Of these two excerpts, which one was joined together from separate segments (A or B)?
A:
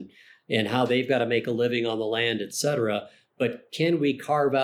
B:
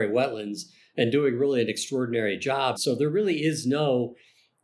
B